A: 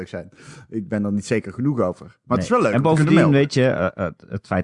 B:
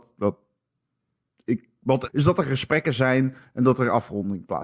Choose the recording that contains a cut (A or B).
B